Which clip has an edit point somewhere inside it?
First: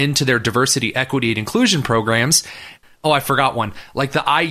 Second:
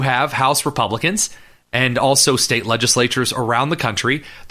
first; 1 cut; at 2.8 s

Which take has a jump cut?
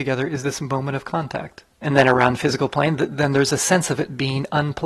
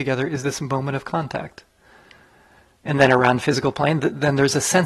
first; 1 cut; at 1.7 s

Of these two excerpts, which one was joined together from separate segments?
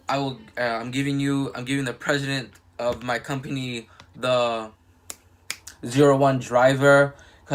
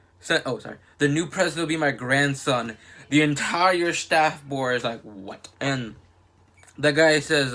second; 2 cuts; at 0.9 s, 5.5 s

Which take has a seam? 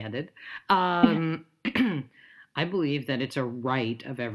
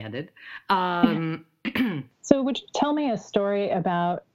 second; 1 cut; at 2.1 s

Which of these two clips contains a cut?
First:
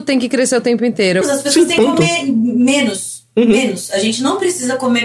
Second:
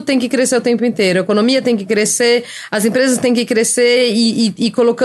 first; 1 cut; at 1.2 s

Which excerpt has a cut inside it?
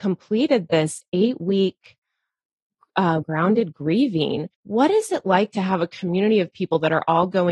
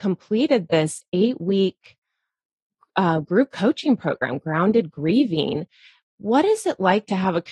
first; 2 cuts; at 3.2 s, 4.5 s

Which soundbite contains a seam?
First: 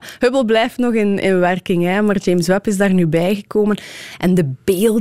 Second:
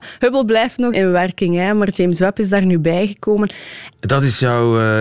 second; 2 cuts; at 0.9 s, 3.9 s

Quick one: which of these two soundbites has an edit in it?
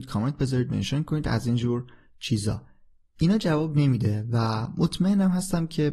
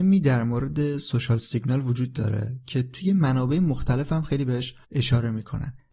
second; 1 cut; at 4.8 s

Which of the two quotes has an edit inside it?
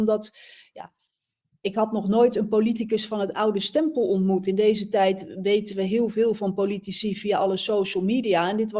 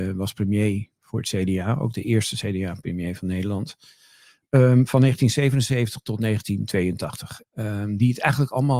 second; 1 cut; at 7.4 s

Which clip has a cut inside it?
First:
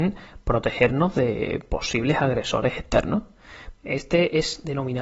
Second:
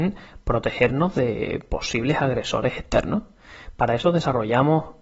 first; 1 cut; at 3.7 s

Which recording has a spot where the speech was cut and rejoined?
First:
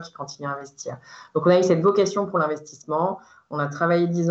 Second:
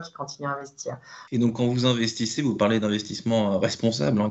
second; 1 cut; at 1.3 s

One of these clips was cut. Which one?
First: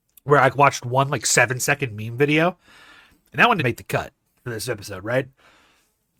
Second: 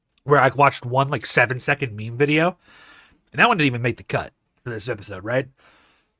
first; 1 cut; at 3.6 s

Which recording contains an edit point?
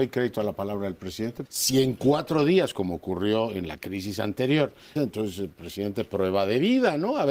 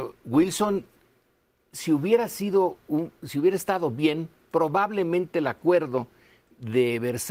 first; 2 cuts; at 1.5 s, 5.0 s

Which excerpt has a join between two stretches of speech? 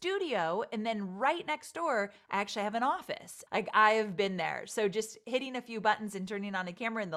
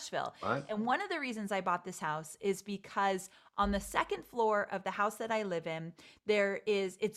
first; 1 cut; at 3.5 s

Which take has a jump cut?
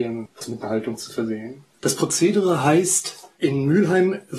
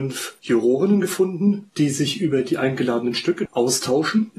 first; 1 cut; at 1.7 s

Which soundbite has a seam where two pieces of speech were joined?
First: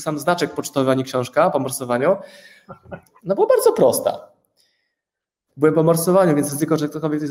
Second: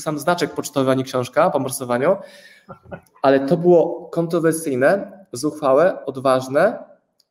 first; 2 cuts; at 3.2 s, 5.5 s

